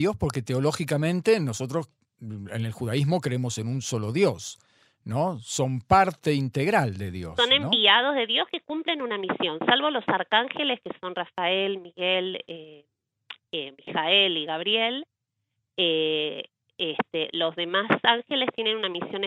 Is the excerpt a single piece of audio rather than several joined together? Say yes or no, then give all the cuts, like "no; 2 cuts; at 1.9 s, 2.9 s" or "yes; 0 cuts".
yes; 0 cuts